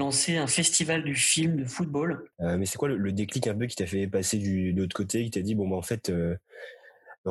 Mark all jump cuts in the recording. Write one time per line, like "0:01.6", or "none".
0:02.3